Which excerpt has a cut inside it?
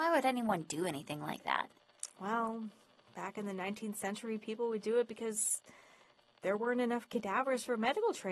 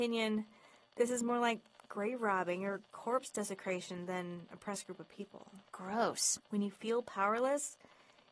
second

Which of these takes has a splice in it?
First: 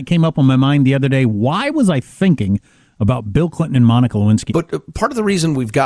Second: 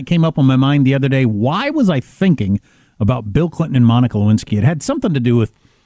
first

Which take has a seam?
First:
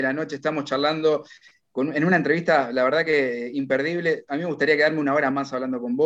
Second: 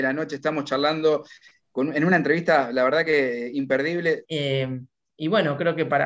second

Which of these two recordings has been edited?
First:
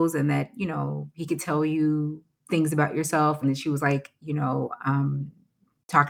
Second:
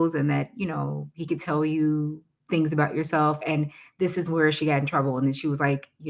first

